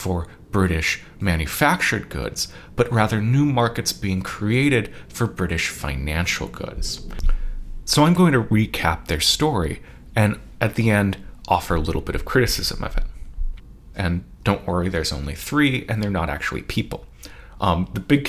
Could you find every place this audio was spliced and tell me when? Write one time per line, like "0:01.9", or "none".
0:13.9